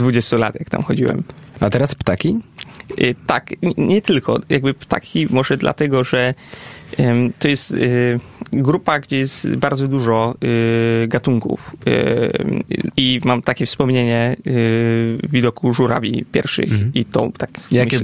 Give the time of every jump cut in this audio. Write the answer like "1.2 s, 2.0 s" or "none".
12.9 s